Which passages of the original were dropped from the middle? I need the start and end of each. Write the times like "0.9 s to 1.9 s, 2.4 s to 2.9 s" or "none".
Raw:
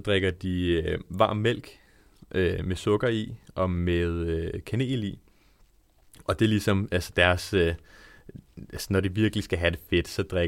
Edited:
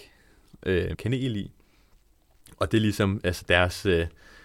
2.6 s to 4.6 s